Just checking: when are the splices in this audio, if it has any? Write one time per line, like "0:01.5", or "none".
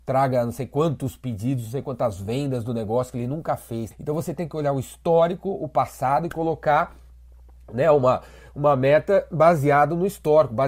0:03.9